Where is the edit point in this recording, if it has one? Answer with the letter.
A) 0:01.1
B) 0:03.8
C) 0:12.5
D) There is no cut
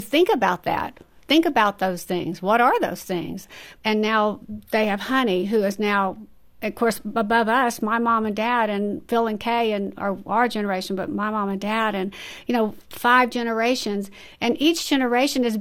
B